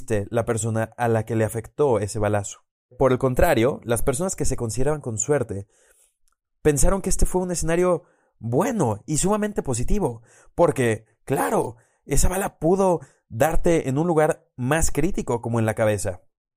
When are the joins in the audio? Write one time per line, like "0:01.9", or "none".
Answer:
none